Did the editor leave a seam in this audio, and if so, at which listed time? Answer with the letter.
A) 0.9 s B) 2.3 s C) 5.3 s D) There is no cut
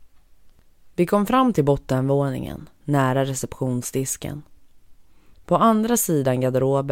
C